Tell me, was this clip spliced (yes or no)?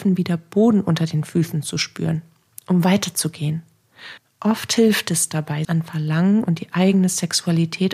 yes